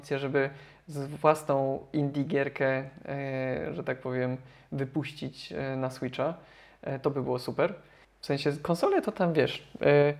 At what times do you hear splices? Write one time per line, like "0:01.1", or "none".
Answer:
0:08.0